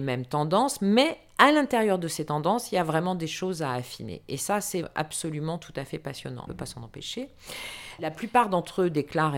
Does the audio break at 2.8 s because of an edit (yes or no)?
no